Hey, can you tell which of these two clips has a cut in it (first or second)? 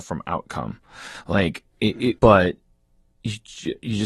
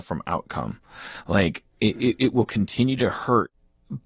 first